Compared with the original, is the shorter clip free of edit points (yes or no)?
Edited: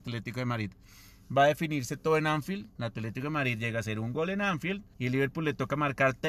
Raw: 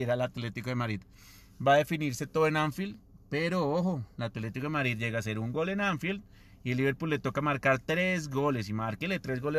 no